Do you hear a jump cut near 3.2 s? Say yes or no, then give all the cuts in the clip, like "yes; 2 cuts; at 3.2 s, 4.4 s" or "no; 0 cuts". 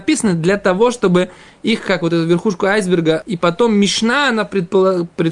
yes; 1 cut; at 3.2 s